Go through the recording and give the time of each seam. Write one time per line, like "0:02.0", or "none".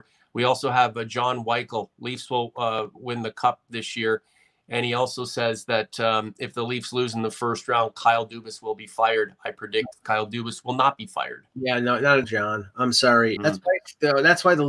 0:12.2
0:13.4

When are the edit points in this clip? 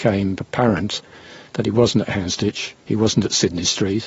0:02.8

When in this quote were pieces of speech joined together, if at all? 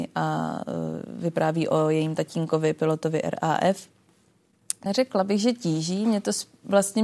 0:04.9

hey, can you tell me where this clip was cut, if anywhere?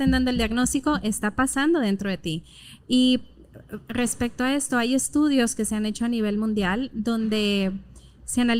none

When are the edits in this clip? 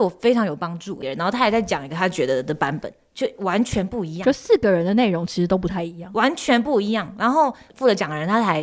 0:01.0

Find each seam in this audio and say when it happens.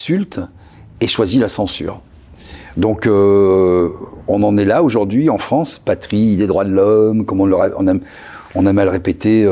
none

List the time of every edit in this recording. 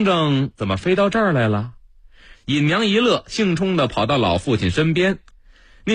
0:02.3
0:03.6

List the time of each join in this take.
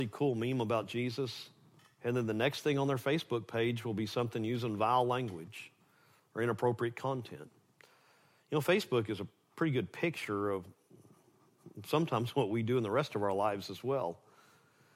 none

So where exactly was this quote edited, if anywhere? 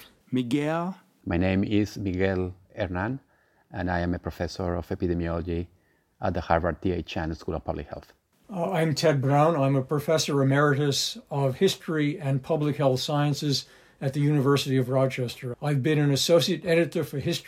0:08.3

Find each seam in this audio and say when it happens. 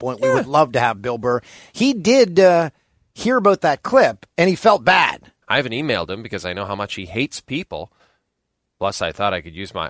0:05.4

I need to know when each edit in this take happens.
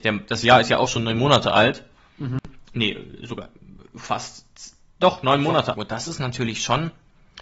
0:05.7

